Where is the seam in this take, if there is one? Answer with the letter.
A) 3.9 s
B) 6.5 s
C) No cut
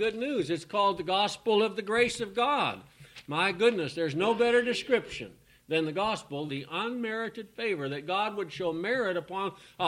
B